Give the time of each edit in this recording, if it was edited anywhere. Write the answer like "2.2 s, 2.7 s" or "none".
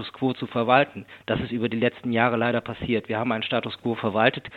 none